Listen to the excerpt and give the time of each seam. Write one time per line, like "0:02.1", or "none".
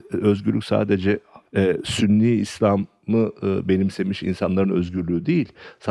none